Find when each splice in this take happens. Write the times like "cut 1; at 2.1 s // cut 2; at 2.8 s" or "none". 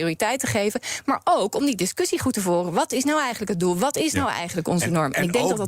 none